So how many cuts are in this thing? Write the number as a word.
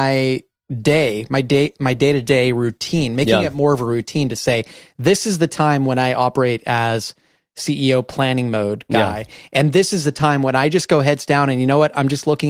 zero